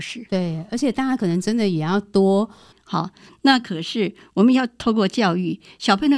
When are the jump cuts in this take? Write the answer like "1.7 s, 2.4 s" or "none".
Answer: 2.7 s